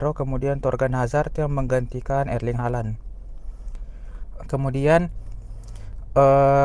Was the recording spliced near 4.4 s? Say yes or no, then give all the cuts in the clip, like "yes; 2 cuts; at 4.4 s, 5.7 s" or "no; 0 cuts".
yes; 1 cut; at 4.4 s